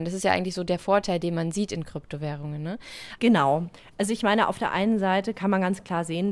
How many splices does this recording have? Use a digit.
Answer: 1